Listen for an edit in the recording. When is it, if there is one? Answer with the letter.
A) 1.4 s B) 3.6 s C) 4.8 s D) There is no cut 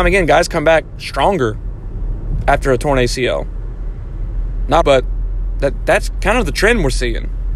C